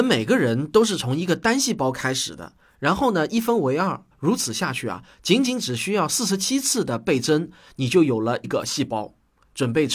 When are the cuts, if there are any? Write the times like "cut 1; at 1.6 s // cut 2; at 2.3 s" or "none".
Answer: cut 1; at 4.1 s // cut 2; at 8.4 s